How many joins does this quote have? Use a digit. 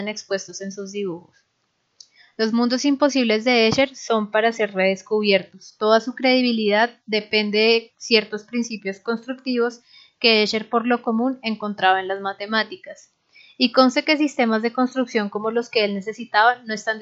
0